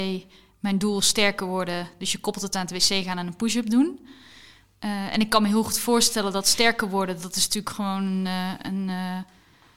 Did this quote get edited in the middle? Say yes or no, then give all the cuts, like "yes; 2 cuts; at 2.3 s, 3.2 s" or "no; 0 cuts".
no; 0 cuts